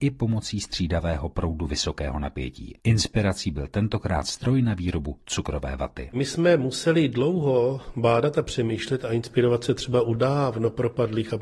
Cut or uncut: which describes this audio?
cut